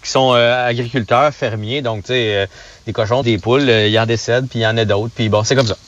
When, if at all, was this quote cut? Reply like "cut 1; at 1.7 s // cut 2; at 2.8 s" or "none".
cut 1; at 3.2 s